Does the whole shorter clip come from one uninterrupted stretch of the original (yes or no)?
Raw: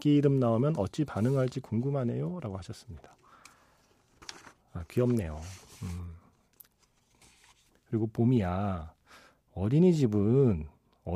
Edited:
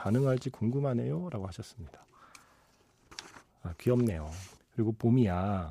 no